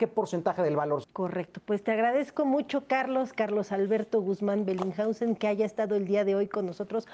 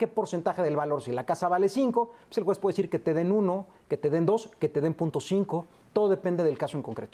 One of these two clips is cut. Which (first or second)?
first